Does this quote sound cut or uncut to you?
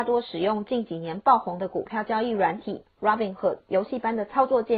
cut